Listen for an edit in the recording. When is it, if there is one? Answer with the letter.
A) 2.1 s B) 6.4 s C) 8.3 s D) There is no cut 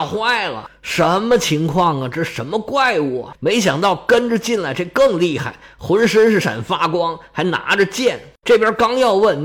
B